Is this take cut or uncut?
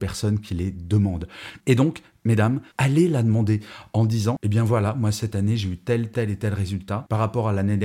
cut